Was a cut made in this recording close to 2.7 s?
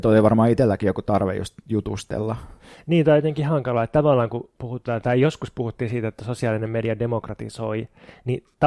no; 1 cut; at 4.6 s

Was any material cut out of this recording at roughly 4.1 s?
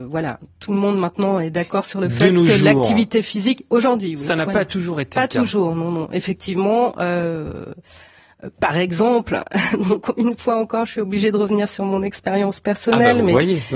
no; 0 cuts

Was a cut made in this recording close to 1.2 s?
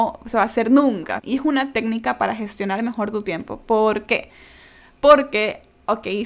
yes; 1 cut; at 1.2 s

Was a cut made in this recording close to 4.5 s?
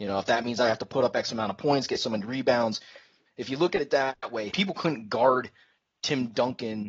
yes; 2 cuts; at 3.3 s, 4.5 s

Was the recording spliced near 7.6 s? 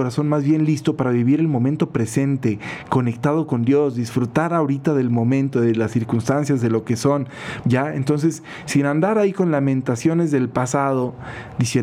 yes; 1 cut; at 7.6 s

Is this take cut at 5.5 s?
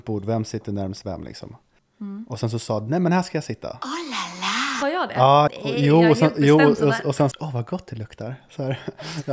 yes; 3 cuts; at 1.8 s, 5.5 s, 7.3 s

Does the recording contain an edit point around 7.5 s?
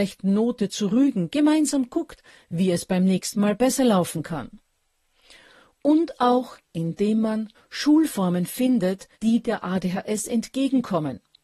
yes; 2 cuts; at 7.5 s, 9.1 s

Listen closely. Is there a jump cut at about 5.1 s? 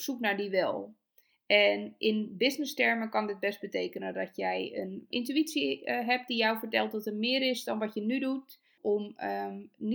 yes; 2 cuts; at 5.1 s, 8.8 s

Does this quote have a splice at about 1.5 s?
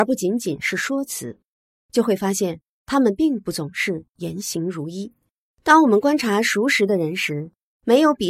no; 1 cut; at 5.5 s

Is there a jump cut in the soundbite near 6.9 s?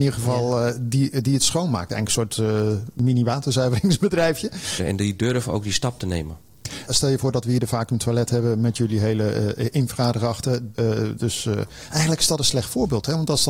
no; 2 cuts; at 4.8 s, 10.7 s

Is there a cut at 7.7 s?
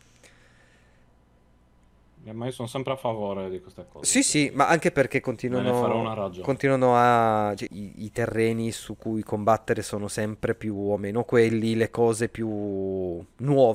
yes; 1 cut; at 7.7 s

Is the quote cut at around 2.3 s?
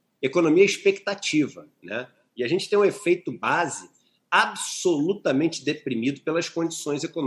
yes; 1 cut; at 2.3 s

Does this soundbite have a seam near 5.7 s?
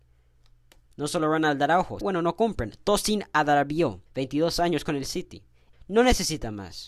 yes; 3 cuts; at 2.0 s, 4.1 s, 5.7 s

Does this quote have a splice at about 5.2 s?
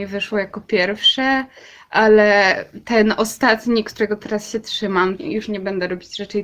yes; 1 cut; at 5.2 s

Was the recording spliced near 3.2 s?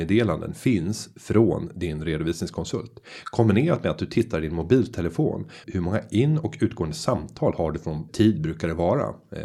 no; 2 cuts; at 5.6 s, 8.1 s

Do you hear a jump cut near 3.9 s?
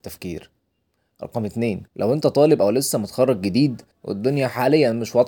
yes; 2 cuts; at 1.9 s, 3.9 s

